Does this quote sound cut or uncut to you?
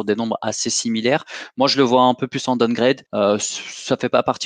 cut